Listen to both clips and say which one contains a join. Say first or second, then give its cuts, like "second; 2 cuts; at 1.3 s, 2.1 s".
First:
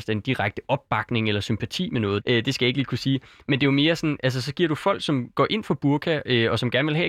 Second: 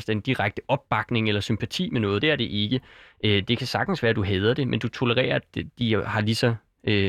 first; 1 cut; at 2.2 s